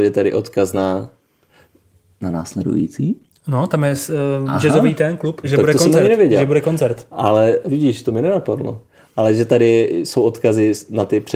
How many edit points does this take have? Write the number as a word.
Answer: two